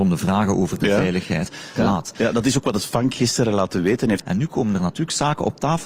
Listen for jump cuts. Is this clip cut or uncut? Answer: cut